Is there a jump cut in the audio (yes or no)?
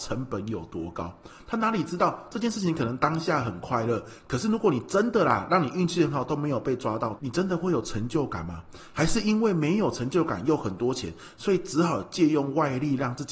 yes